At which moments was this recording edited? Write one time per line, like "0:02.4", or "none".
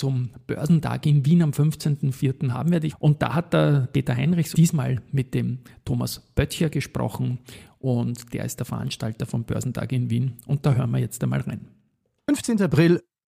0:02.9
0:04.5

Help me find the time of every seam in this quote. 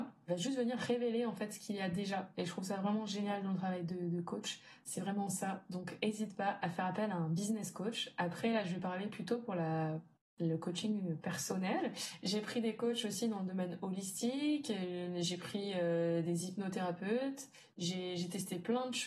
none

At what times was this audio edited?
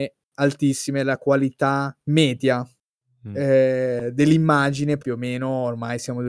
0:02.0
0:05.0

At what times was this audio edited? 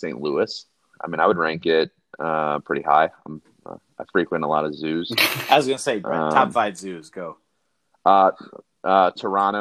0:00.9

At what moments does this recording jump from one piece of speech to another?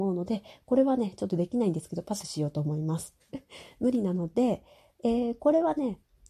0:03.3

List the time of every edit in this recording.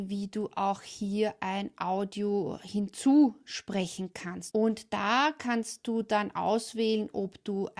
0:04.5

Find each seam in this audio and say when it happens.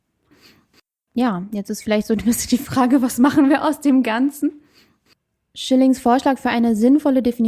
0:05.4

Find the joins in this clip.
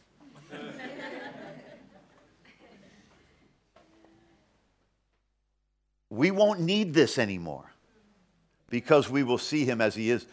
none

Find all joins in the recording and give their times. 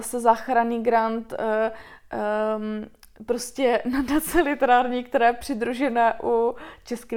none

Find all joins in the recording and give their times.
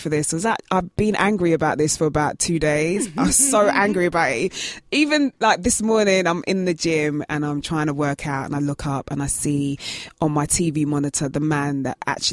none

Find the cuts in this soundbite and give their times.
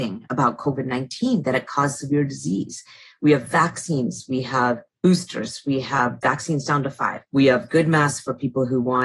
0:07.3

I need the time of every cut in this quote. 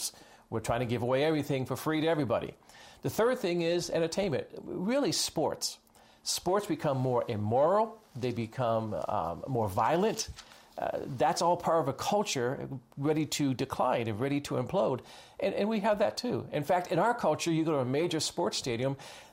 none

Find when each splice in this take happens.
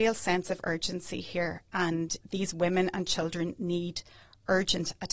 0:02.2

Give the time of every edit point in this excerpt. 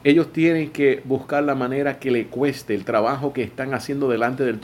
none

